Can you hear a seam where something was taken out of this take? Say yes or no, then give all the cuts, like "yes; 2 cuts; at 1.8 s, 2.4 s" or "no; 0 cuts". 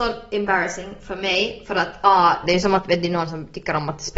yes; 1 cut; at 2.4 s